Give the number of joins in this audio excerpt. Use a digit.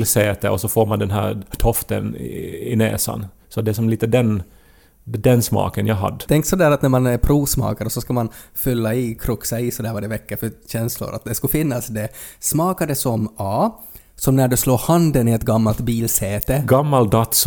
1